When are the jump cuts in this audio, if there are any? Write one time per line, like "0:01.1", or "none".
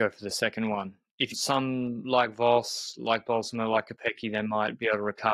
0:01.3

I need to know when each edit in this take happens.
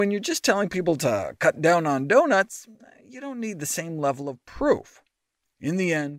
none

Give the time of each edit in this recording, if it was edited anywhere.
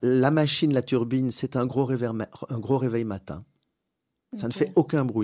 none

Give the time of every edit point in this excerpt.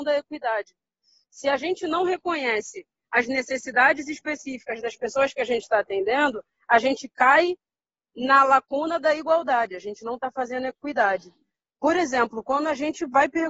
none

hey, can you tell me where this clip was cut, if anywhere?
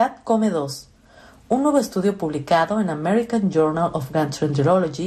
none

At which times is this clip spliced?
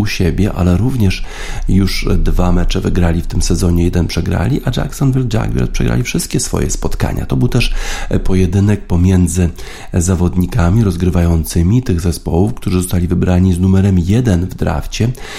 none

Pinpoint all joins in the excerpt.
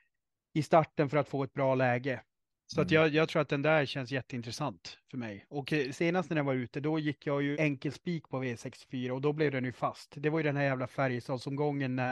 0:05.9
0:07.5

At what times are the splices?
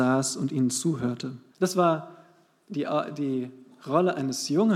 0:01.5

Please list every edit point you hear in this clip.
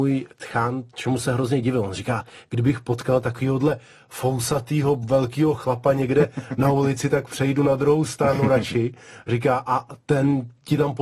none

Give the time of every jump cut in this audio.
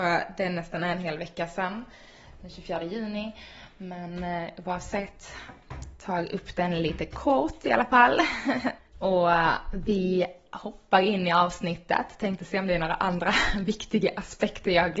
0:08.8

